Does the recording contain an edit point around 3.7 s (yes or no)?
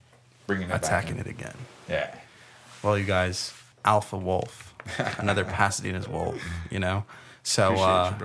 yes